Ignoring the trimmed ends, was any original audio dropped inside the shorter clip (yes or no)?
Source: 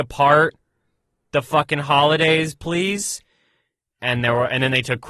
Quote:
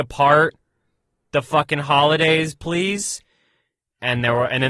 no